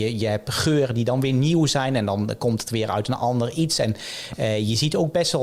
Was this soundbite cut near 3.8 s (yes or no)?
no